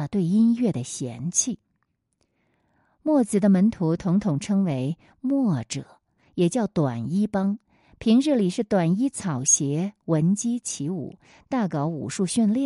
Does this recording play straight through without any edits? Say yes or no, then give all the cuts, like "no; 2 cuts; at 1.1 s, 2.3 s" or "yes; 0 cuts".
yes; 0 cuts